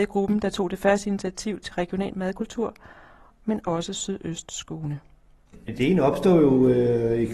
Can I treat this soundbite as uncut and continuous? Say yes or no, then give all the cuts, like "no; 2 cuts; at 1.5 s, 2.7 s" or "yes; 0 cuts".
no; 1 cut; at 3.3 s